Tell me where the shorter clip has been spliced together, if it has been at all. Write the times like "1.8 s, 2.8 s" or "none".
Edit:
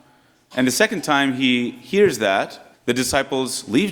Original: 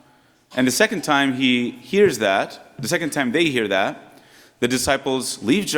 2.7 s